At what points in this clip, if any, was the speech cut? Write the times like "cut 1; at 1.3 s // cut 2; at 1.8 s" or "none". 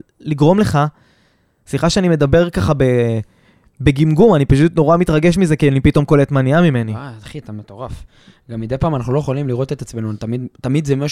none